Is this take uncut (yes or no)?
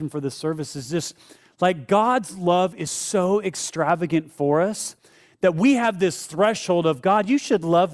yes